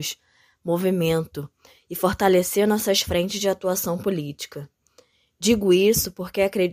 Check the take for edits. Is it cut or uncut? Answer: uncut